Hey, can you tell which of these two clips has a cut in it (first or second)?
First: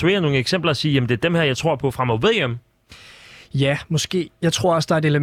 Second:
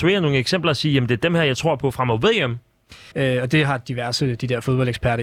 second